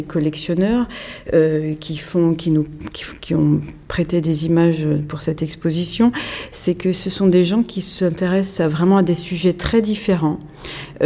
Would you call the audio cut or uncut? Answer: uncut